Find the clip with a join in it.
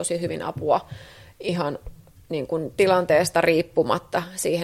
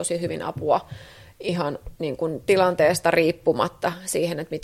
second; 1 cut; at 2.0 s

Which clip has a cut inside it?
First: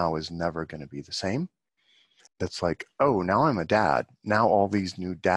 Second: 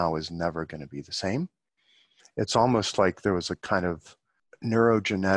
first; 1 cut; at 2.3 s

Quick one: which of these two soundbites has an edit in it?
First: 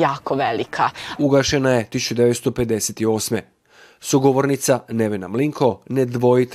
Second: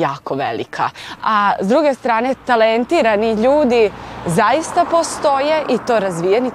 first; 1 cut; at 1.2 s

